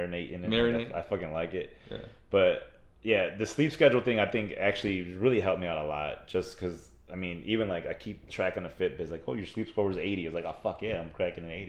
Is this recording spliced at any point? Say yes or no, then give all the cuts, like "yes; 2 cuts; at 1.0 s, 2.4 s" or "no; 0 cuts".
no; 0 cuts